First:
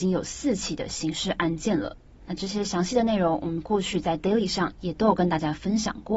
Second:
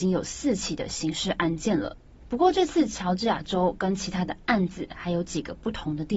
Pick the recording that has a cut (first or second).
second